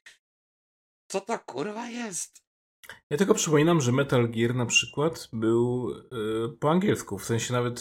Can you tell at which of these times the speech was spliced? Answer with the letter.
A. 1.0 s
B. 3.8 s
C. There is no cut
C